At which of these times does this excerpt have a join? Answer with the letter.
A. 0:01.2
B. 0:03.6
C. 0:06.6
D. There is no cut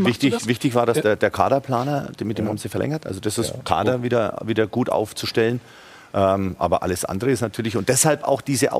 B